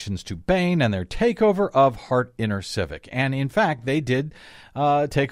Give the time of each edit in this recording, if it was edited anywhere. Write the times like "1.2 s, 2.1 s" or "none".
none